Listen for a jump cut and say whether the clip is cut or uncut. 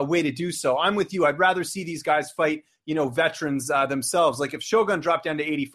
uncut